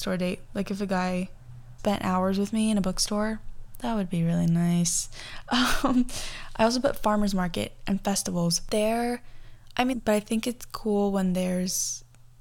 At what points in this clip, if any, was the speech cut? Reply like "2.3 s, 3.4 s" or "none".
1.8 s, 9.9 s